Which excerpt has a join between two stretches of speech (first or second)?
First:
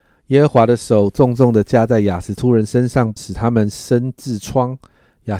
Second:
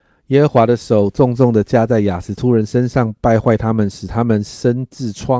first